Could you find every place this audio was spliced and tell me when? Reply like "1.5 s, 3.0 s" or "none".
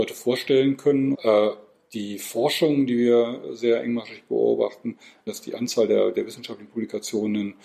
1.1 s, 5.3 s

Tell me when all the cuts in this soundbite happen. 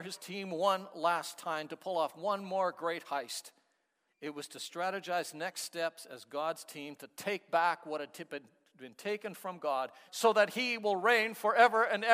4.1 s, 10.1 s

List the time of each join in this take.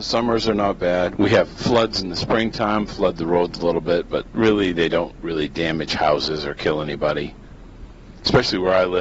1.2 s

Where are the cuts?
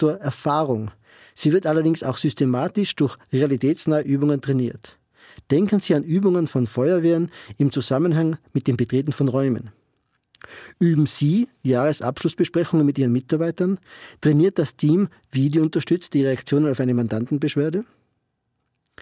none

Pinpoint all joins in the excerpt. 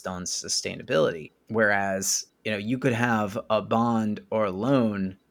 none

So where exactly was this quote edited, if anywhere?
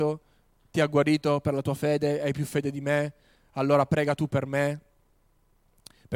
none

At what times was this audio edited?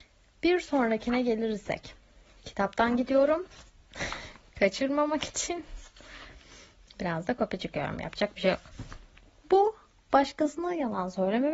9.4 s

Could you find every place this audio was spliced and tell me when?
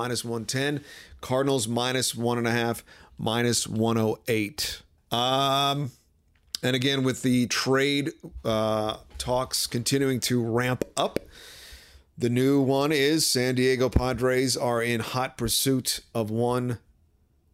5.0 s

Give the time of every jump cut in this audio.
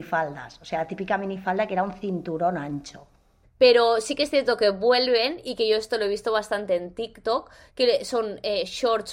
3.4 s, 7.7 s

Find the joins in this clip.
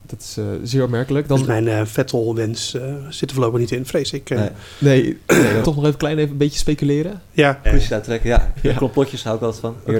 5.6 s, 7.6 s

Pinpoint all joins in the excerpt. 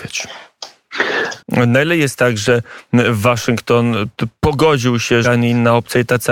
1.4 s, 5.2 s

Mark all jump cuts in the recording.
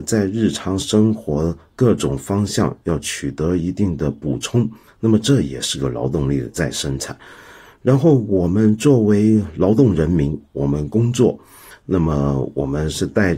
none

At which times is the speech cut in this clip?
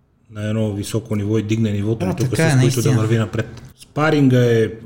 2.0 s, 3.7 s

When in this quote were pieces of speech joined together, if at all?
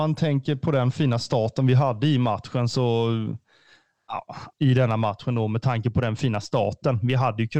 4.5 s

